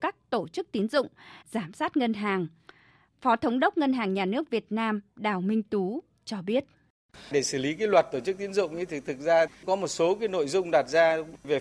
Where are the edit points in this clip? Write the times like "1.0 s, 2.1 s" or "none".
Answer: 1.4 s